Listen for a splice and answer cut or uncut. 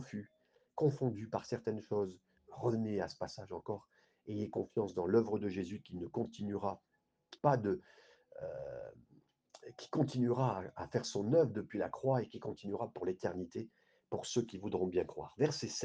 cut